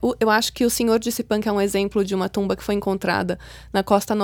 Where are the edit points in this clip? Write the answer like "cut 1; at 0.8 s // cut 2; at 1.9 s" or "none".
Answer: none